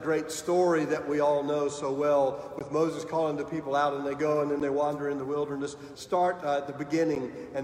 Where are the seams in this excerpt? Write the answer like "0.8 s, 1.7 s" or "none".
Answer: 5.9 s